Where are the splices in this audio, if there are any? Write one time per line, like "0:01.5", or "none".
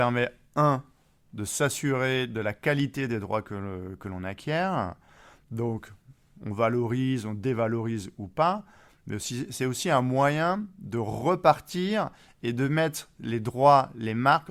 none